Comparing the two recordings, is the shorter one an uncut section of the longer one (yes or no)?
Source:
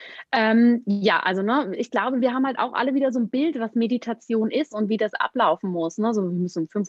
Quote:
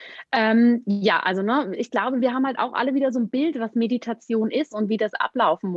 yes